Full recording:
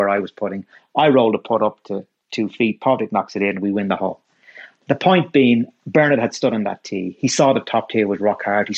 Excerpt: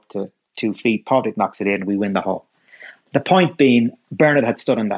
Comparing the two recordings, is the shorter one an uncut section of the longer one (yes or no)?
yes